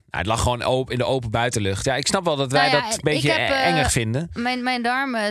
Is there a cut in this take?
no; 0 cuts

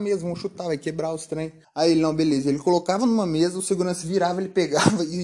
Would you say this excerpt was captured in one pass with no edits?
yes; 0 cuts

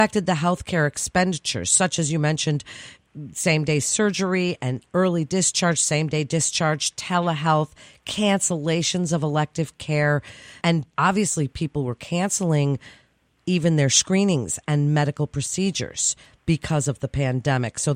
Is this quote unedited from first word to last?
yes; 0 cuts

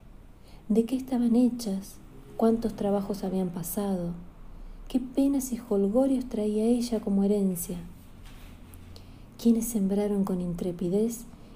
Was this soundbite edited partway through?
no; 0 cuts

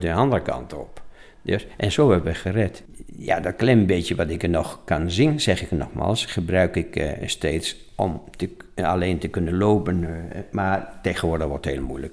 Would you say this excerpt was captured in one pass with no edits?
yes; 0 cuts

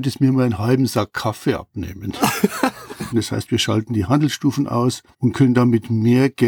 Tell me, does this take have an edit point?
yes; 2 cuts; at 3.1 s, 5.1 s

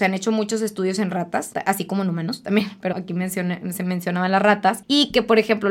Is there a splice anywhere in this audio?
yes; 1 cut; at 2.9 s

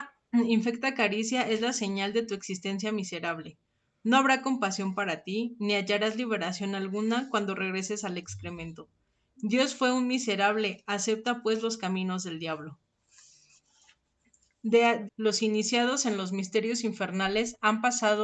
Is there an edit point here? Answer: yes; 1 cut; at 15.1 s

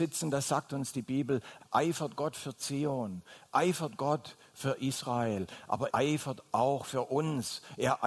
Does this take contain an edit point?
yes; 2 cuts; at 1.6 s, 5.9 s

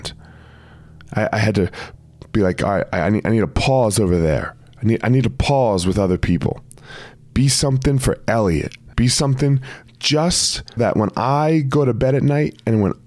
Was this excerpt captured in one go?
no; 2 cuts; at 8.9 s, 10.8 s

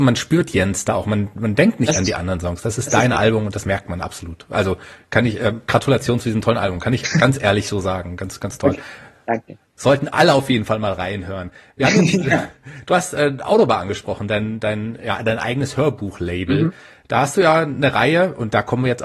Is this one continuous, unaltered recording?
yes; 0 cuts

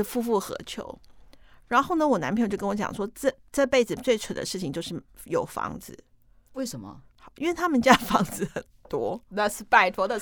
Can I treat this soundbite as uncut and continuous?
yes; 0 cuts

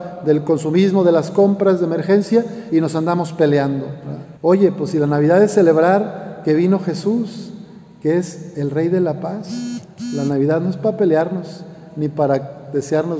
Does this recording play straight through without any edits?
no; 1 cut; at 4.4 s

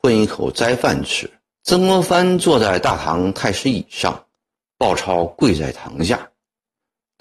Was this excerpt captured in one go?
no; 1 cut; at 1.5 s

